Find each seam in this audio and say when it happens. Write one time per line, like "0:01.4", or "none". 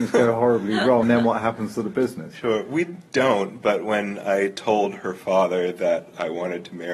0:01.0